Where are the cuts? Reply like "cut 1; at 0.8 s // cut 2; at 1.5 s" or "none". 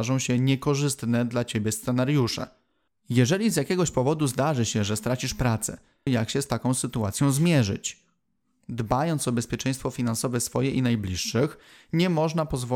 cut 1; at 2.9 s // cut 2; at 6.1 s